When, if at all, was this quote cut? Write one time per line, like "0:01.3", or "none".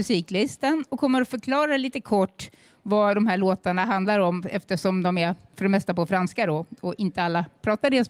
none